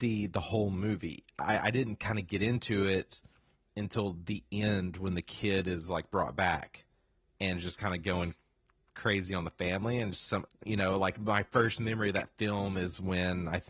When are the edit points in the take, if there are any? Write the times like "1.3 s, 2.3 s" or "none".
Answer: 10.5 s